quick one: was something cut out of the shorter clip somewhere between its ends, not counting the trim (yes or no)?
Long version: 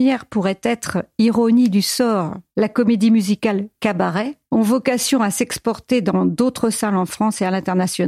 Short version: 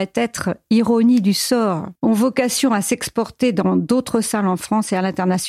yes